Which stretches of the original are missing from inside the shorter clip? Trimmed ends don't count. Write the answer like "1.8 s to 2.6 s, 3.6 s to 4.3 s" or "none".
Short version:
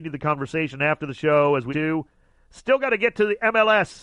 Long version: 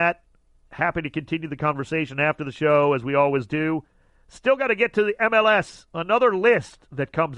3.1 s to 3.5 s